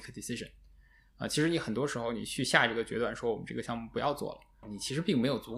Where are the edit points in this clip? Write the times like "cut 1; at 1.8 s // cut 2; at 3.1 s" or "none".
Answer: cut 1; at 4.6 s

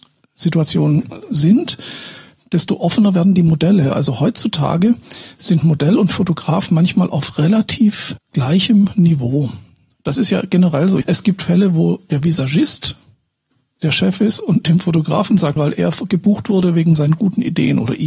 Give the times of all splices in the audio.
cut 1; at 11.0 s // cut 2; at 15.6 s

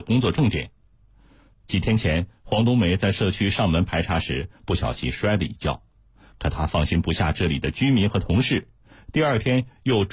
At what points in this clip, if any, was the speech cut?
cut 1; at 1.5 s

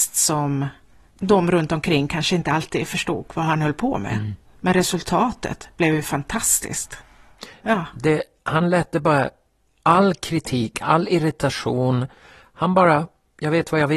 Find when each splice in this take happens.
cut 1; at 7.6 s

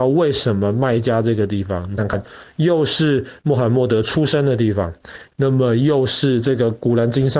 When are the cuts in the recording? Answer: cut 1; at 2.0 s // cut 2; at 5.3 s

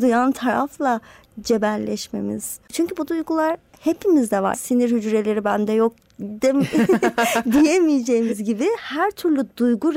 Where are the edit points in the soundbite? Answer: cut 1; at 2.7 s // cut 2; at 4.5 s

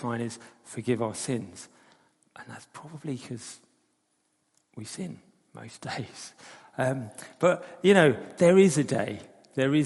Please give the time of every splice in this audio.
none

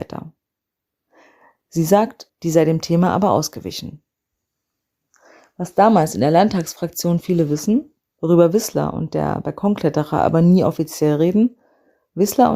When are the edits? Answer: cut 1; at 2.3 s

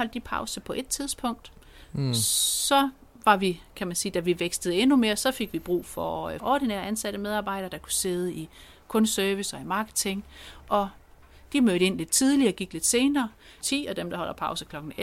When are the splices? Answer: cut 1; at 6.4 s // cut 2; at 13.6 s

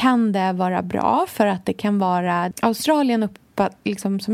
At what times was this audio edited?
cut 1; at 2.5 s

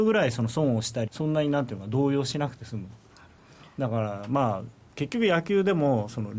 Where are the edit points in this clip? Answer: cut 1; at 1.1 s

